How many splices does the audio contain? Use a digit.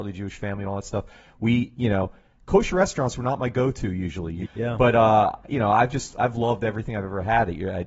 1